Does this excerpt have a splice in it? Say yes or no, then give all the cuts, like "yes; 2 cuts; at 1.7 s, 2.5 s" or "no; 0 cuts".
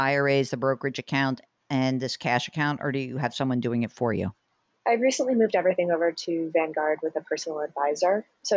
no; 0 cuts